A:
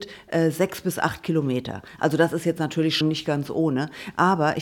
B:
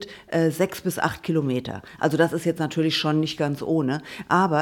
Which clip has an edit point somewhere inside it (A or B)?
A